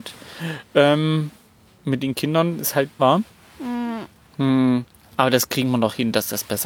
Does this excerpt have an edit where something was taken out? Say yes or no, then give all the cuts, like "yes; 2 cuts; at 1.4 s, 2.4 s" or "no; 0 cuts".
yes; 2 cuts; at 1.6 s, 3.0 s